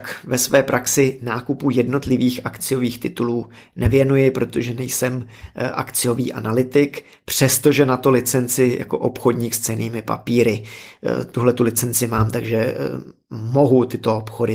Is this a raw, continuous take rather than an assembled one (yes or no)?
yes